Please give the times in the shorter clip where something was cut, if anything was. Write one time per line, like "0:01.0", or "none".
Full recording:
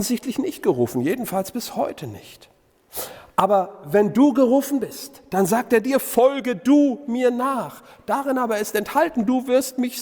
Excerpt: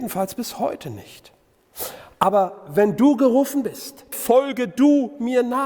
0:04.1